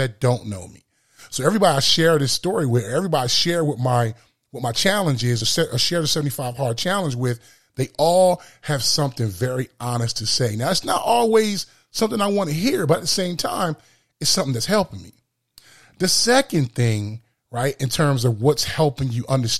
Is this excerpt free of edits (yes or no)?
yes